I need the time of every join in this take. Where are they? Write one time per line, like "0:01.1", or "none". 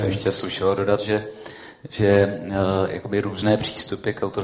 none

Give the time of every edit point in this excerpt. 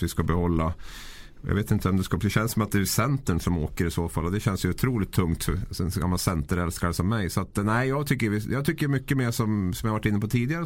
none

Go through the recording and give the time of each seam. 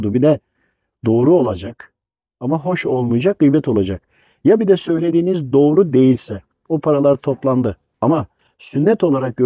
0:07.9

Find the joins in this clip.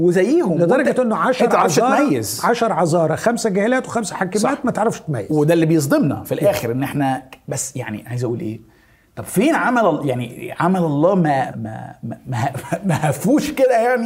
0:11.5

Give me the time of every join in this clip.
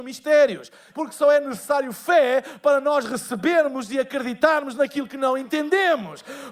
0:00.9

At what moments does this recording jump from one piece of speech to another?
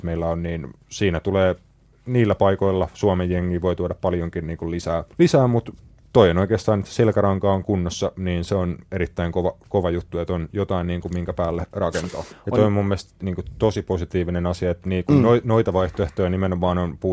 0:05.1
0:12.3

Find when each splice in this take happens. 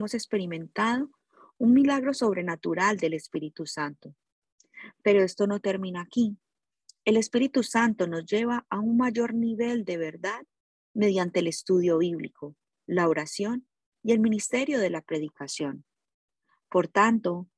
none

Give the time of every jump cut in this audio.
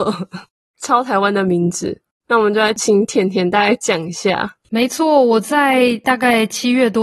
0:02.2

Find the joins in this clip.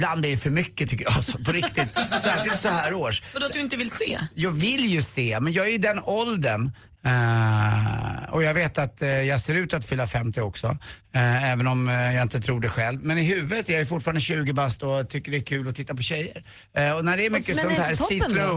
0:07.0

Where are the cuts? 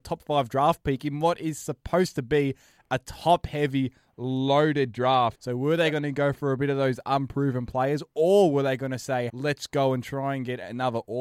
0:05.3
0:09.3

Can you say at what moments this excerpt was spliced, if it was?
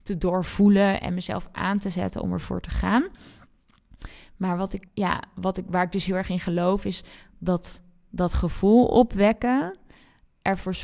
0:04.9

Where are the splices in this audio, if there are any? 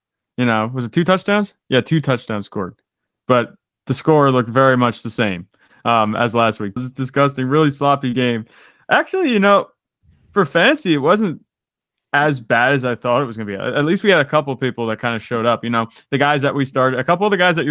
0:06.8

